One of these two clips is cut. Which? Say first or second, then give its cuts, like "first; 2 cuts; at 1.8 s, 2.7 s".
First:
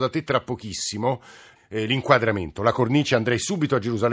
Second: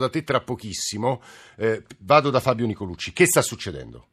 first; 1 cut; at 1.6 s